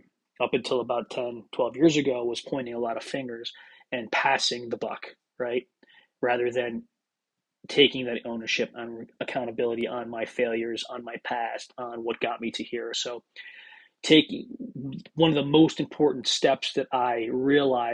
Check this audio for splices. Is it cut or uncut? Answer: uncut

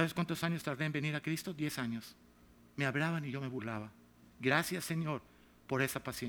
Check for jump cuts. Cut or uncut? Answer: uncut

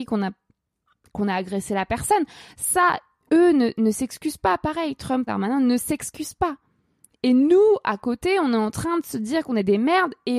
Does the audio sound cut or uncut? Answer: cut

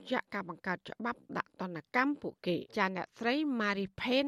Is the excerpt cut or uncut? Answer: cut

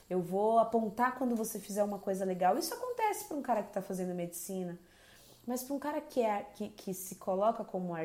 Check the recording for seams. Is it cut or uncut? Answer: uncut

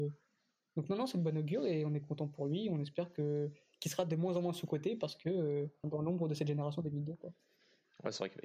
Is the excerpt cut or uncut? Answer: cut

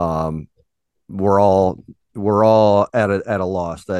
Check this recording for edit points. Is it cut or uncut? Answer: uncut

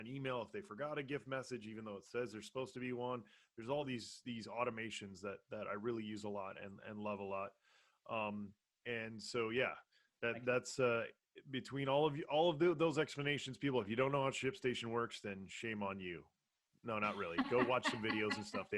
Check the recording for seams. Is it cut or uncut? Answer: uncut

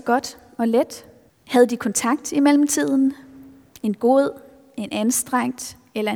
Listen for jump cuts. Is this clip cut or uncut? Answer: cut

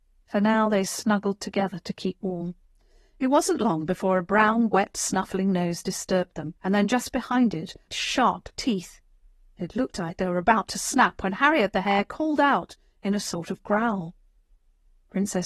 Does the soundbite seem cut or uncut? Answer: cut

